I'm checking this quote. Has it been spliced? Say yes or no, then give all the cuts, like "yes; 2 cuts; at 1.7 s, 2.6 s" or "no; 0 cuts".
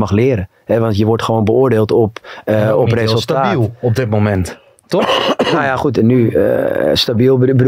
no; 0 cuts